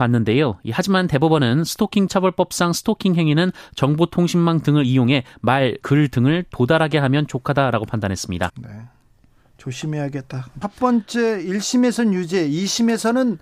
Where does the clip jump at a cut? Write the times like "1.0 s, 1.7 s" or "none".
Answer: 5.8 s, 8.5 s, 10.6 s